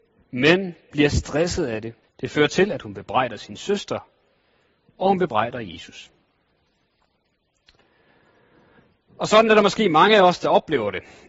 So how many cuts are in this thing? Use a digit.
1